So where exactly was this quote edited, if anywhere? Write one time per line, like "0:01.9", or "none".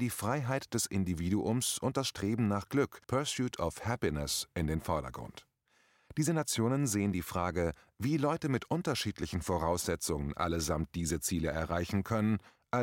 0:03.0